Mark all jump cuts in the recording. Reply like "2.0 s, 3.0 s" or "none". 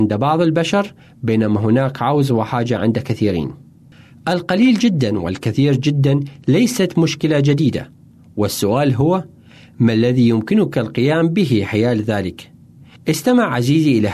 13.0 s